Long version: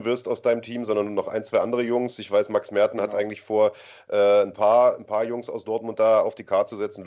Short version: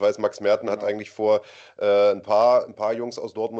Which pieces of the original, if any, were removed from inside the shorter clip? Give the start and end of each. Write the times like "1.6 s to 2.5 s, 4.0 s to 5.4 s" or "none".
none